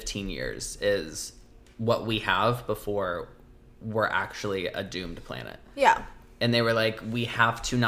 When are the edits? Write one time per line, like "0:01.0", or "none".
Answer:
none